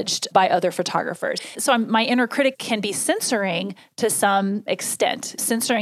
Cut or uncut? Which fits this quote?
uncut